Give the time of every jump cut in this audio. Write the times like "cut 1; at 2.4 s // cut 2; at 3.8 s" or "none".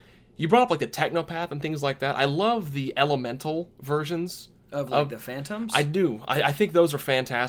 none